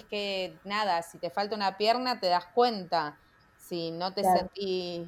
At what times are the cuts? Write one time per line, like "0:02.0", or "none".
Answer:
none